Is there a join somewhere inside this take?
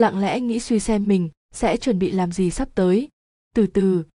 no; 0 cuts

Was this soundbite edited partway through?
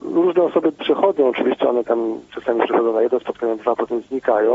no; 0 cuts

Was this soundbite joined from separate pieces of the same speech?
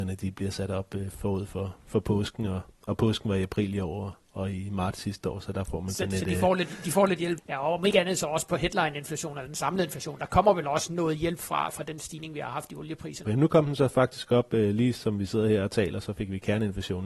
yes; 2 cuts; at 7.4 s, 13.2 s

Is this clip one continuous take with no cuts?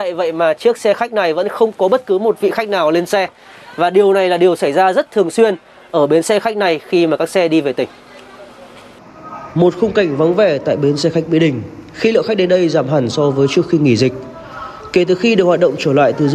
yes; 0 cuts

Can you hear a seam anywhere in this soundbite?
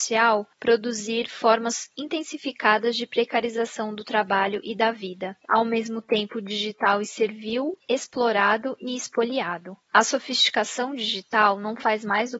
yes; 3 cuts; at 5.4 s, 7.8 s, 9.9 s

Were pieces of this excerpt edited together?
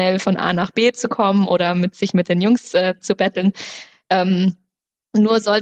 no; 0 cuts

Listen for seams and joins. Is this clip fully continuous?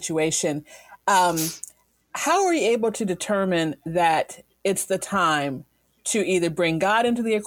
yes; 0 cuts

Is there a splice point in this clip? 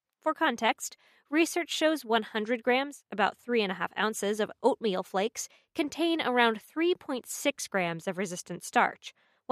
no; 0 cuts

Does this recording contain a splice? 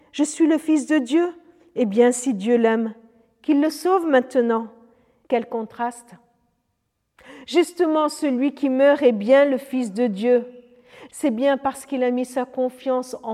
yes; 2 cuts; at 5.2 s, 11.1 s

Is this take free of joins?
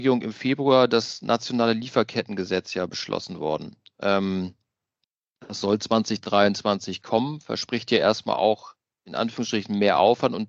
yes; 0 cuts

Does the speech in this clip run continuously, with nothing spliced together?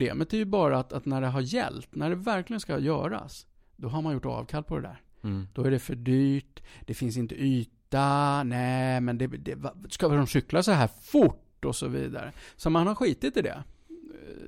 yes; 0 cuts

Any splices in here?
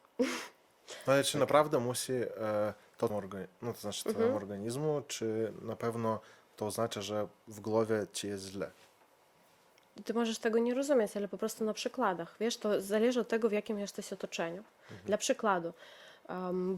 yes; 1 cut; at 3.1 s

